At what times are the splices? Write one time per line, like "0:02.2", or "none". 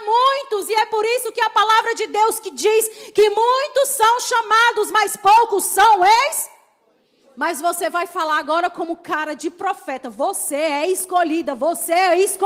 0:07.2